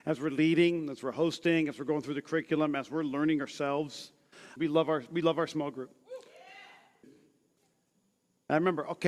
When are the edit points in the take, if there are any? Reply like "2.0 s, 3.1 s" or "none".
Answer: 4.6 s, 7.0 s